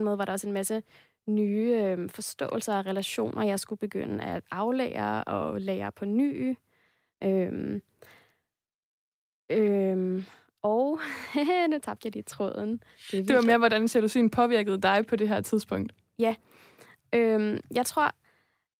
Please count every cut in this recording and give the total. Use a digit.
0